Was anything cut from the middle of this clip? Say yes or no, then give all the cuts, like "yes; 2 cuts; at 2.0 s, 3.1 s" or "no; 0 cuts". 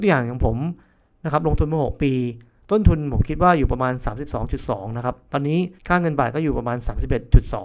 yes; 1 cut; at 5.8 s